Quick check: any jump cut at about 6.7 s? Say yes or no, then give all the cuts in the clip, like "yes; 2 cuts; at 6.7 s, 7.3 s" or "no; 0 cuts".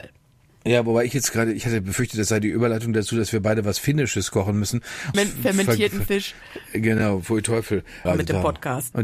no; 2 cuts; at 5.1 s, 8.1 s